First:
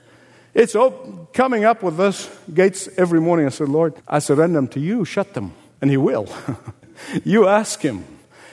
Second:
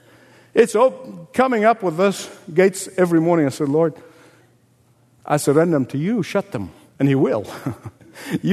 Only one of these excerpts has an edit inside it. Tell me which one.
first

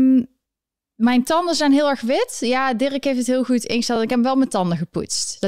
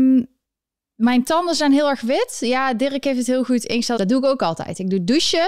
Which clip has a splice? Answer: second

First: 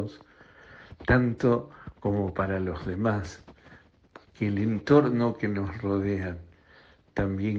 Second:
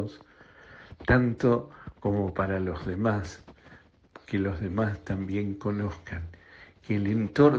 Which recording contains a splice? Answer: first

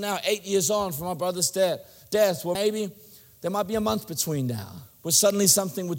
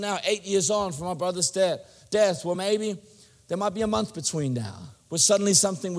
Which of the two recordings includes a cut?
first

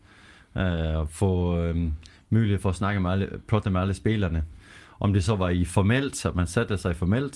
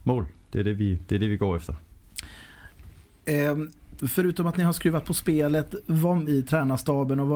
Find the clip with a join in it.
second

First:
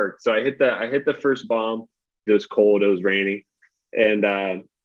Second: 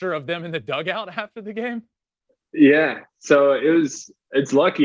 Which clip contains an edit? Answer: first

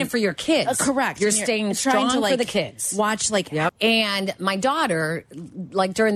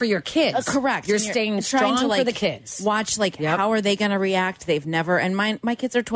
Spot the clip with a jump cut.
first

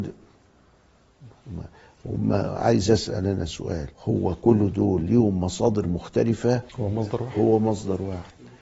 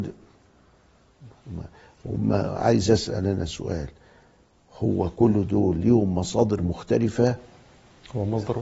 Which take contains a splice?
first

